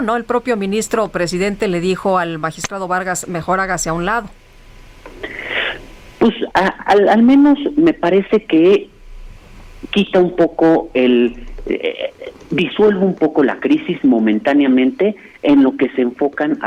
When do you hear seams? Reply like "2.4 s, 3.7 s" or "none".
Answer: 6.5 s